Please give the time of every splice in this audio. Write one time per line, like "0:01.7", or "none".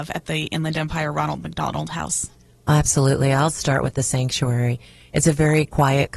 none